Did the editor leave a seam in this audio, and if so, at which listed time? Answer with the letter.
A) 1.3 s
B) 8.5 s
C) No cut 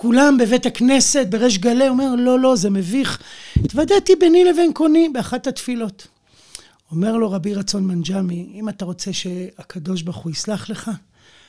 C